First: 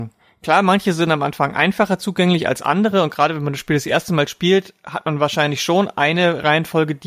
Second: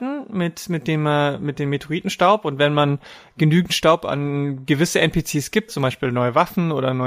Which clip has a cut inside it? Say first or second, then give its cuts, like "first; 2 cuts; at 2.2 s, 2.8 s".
second; 1 cut; at 5.7 s